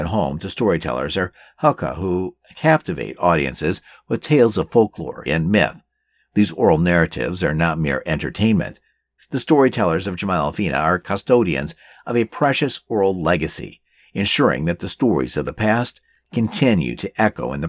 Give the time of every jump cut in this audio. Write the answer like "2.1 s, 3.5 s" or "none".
5.3 s, 9.2 s